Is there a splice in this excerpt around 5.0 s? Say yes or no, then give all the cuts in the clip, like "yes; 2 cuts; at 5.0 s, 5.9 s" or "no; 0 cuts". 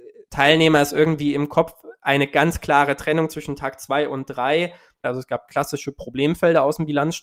yes; 1 cut; at 5.0 s